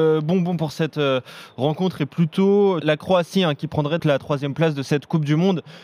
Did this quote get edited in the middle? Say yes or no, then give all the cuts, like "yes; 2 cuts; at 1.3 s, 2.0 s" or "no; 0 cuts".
yes; 2 cuts; at 2.8 s, 4.0 s